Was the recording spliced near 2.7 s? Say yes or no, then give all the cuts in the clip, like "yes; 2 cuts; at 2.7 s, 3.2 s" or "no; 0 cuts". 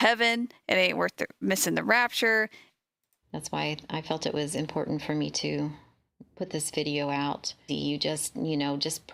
yes; 2 cuts; at 2.7 s, 7.7 s